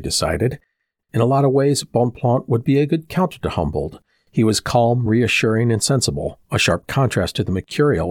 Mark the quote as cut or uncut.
uncut